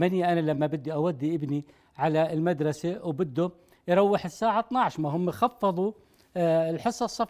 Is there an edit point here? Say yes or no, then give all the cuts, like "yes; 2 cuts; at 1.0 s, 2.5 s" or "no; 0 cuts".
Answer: no; 0 cuts